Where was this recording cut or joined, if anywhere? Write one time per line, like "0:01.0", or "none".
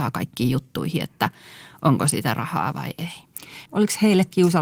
0:03.7